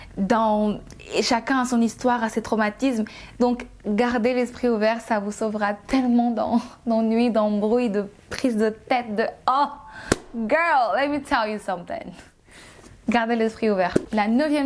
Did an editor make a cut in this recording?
no; 0 cuts

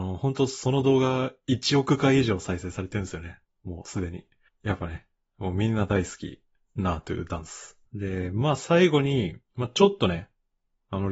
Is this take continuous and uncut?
no; 2 cuts; at 7.9 s, 9.4 s

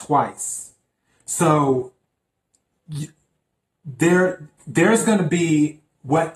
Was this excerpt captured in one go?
yes; 0 cuts

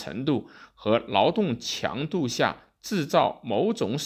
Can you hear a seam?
no; 0 cuts

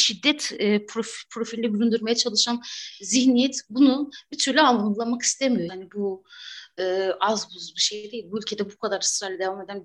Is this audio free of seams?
no; 1 cut; at 5.7 s

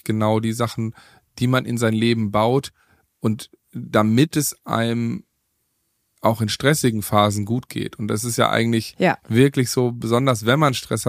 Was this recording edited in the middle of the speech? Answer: no; 0 cuts

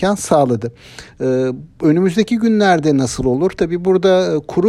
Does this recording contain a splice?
no; 0 cuts

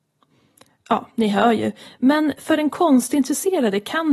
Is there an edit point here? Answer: yes; 1 cut; at 1.9 s

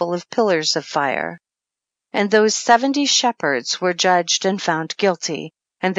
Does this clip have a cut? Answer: no; 0 cuts

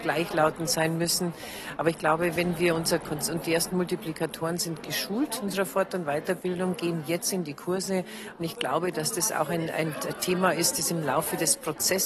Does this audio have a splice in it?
no; 0 cuts

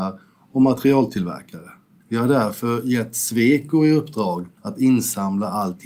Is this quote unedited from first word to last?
no; 2 cuts; at 2.0 s, 4.6 s

